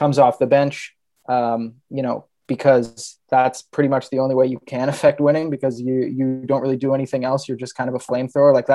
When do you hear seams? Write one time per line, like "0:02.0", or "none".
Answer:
none